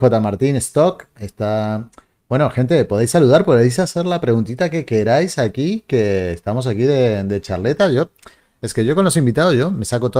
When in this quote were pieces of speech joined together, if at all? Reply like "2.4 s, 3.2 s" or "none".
none

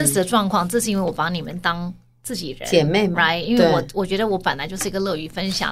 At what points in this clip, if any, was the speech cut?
none

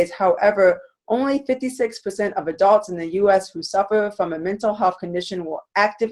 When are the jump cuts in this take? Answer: none

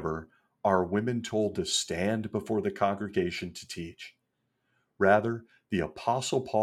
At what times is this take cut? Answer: none

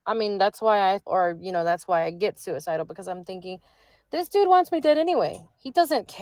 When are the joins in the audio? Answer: 1.1 s

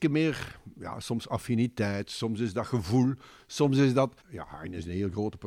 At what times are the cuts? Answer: 4.2 s

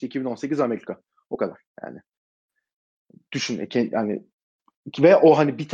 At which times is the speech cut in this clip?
none

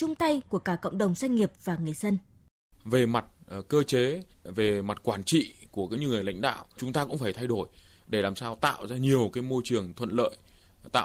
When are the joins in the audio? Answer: 4.3 s, 6.8 s

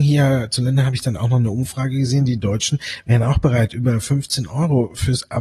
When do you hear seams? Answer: none

